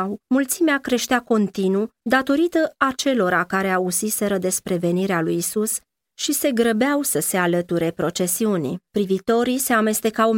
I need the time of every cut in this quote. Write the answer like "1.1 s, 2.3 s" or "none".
8.9 s